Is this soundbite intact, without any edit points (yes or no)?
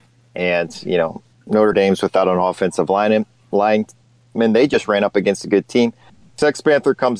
yes